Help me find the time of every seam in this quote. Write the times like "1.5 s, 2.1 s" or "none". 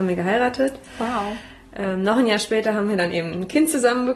none